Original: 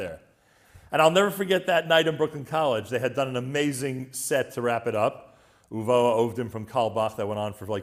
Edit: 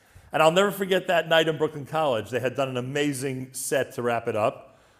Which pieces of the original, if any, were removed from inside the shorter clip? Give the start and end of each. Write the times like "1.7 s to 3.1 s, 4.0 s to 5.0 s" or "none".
none